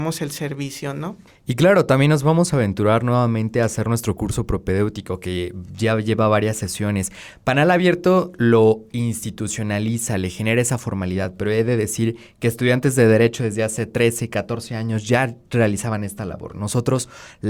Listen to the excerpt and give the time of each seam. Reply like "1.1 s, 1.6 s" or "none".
none